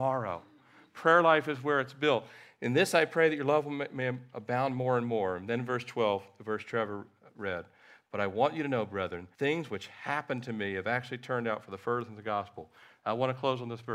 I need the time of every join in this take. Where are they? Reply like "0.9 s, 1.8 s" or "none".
9.3 s